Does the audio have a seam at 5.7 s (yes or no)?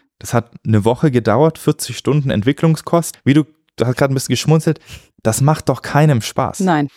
no